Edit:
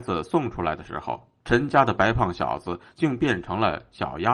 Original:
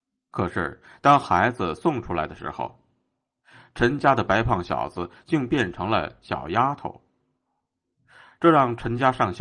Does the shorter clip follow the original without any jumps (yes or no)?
no